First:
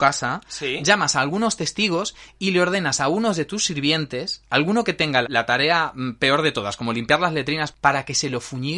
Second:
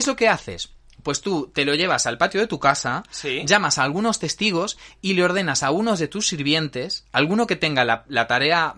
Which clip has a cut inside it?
first; 2 cuts; at 5.2 s, 7.7 s

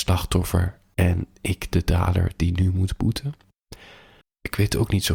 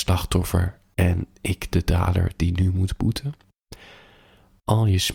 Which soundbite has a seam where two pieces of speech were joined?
first; 1 cut; at 4.2 s

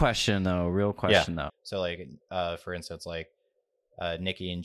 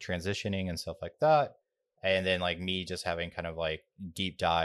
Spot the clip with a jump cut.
first; 1 cut; at 1.5 s

